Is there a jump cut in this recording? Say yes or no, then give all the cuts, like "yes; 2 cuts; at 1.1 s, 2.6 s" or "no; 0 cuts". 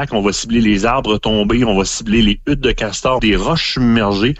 yes; 1 cut; at 3.2 s